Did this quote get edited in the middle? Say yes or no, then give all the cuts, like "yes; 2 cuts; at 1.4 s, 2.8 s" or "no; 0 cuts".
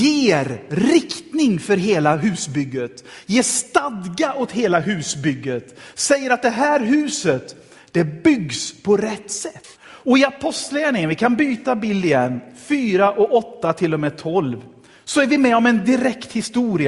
yes; 1 cut; at 9.7 s